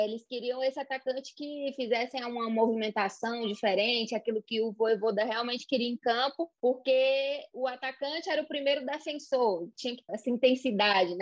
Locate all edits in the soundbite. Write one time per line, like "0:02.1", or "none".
0:06.6
0:10.1